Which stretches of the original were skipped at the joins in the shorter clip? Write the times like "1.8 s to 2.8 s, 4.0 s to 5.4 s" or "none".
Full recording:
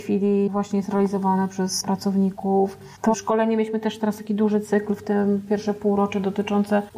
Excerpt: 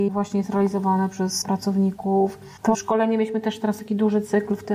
none